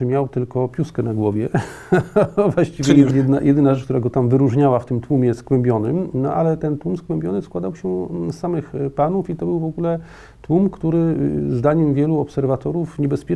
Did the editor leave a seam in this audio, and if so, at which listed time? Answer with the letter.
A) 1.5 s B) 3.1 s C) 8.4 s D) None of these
B